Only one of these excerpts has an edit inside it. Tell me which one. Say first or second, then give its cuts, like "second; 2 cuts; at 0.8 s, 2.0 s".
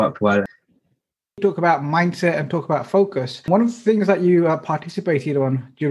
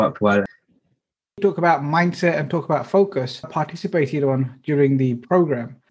second; 1 cut; at 3.4 s